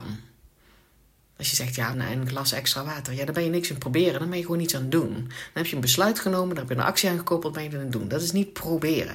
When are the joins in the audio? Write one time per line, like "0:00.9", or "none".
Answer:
0:01.9